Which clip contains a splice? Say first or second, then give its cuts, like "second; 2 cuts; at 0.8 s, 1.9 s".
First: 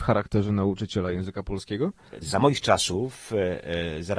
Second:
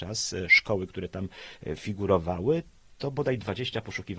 first; 1 cut; at 2.2 s